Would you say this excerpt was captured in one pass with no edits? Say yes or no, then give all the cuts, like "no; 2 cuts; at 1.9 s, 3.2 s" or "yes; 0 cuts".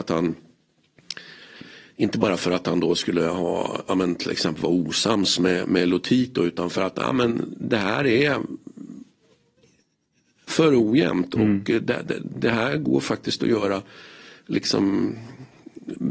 yes; 0 cuts